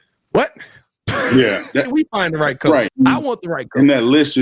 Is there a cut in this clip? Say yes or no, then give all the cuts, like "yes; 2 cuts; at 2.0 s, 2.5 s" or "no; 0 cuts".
yes; 2 cuts; at 1.8 s, 2.9 s